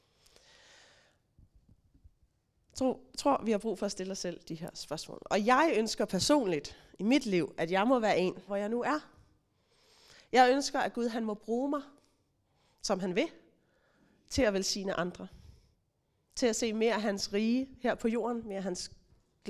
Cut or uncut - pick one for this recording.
cut